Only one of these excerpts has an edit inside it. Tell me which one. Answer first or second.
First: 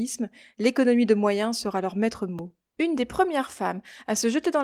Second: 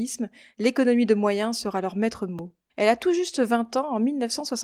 second